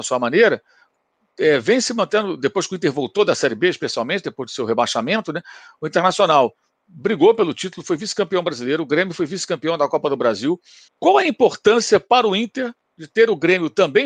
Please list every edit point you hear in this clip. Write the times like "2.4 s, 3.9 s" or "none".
10.9 s